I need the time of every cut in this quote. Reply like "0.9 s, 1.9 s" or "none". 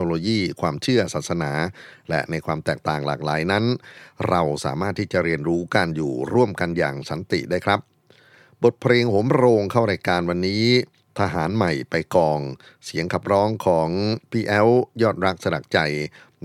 none